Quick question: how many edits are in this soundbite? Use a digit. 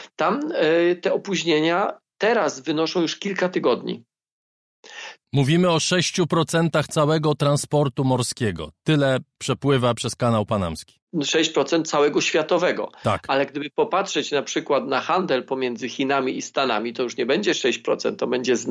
1